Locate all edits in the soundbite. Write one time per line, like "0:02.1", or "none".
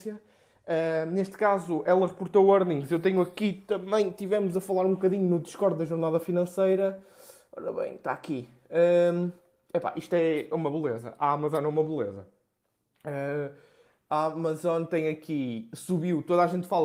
none